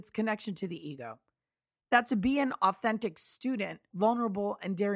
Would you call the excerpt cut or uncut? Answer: cut